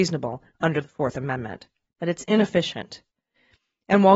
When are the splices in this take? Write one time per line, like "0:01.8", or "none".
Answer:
0:01.9